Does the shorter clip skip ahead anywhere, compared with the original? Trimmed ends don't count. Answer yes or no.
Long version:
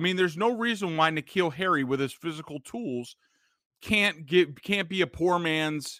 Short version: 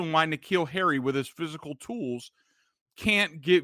no